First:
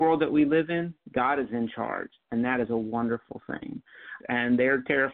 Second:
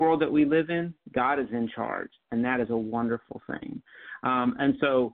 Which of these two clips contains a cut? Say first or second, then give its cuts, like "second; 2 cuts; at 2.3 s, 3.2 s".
first; 1 cut; at 4.2 s